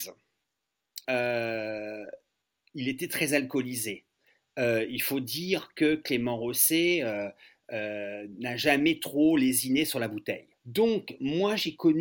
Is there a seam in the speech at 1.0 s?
yes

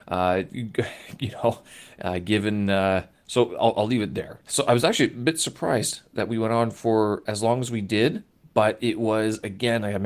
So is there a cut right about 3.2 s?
no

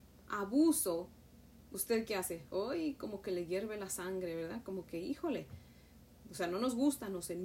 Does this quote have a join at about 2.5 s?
no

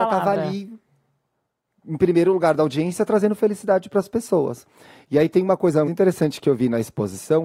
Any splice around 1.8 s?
no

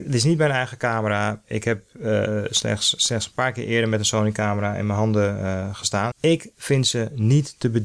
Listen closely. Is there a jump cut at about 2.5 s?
no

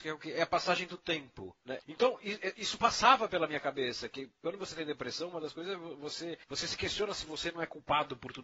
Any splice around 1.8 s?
yes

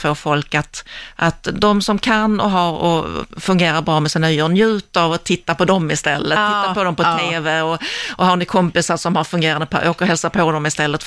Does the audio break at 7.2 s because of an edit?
no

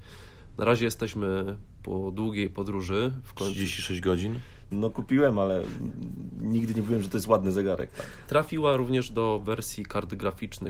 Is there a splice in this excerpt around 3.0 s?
no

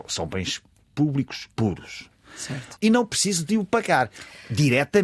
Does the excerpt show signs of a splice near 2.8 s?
yes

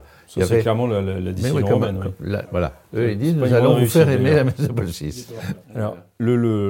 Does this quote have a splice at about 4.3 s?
no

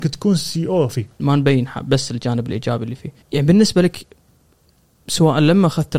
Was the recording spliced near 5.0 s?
no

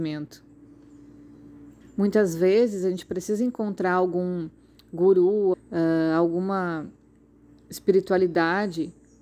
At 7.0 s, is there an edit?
no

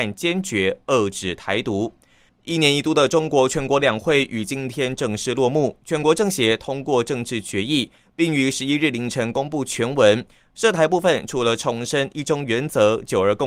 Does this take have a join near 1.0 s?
no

